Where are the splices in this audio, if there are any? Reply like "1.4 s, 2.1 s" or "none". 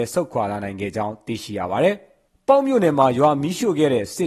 none